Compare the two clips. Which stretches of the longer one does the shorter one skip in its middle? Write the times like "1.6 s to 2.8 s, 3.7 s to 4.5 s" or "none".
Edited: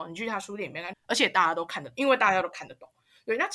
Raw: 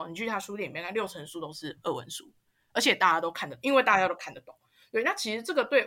0.9 s to 2.6 s